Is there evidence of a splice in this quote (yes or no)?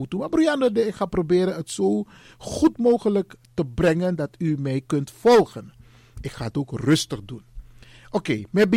no